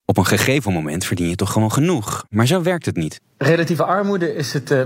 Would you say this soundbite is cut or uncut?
uncut